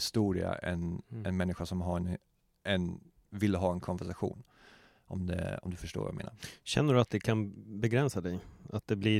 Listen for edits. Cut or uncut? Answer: uncut